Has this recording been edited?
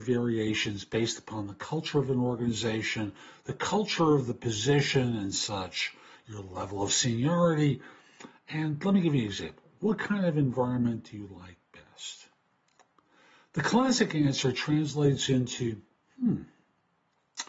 no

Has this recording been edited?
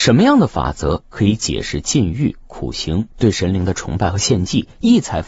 no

